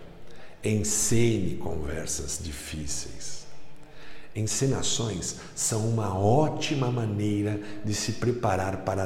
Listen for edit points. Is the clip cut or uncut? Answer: uncut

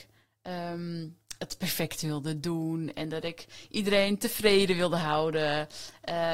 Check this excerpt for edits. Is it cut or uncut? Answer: uncut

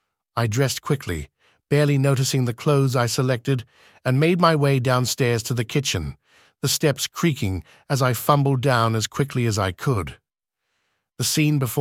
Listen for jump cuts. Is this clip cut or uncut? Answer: uncut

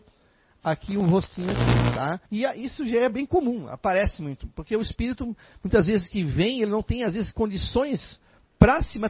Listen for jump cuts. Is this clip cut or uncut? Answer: cut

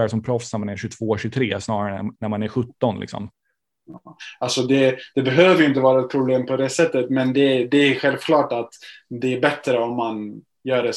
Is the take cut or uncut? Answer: uncut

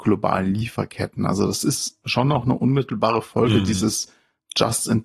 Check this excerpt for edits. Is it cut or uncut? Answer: uncut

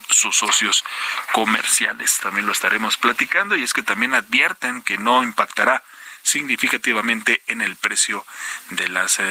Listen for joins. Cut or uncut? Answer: cut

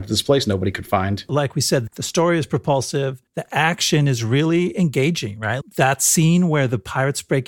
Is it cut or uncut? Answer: cut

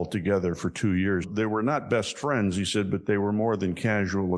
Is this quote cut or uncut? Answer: cut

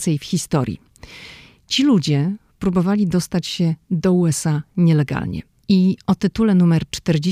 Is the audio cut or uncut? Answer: cut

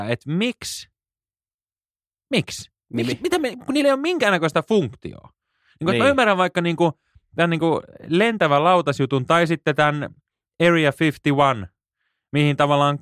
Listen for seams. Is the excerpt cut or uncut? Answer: uncut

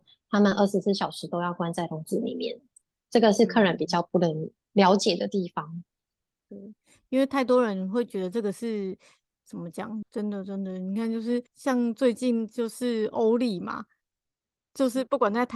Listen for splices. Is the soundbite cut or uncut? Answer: cut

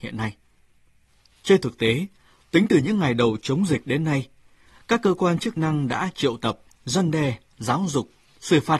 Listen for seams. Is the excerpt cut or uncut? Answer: uncut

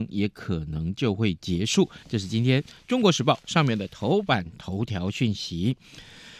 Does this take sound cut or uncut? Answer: uncut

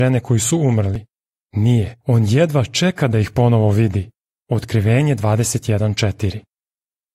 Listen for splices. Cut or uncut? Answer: cut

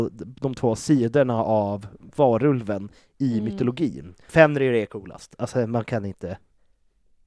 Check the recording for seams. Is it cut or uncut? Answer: cut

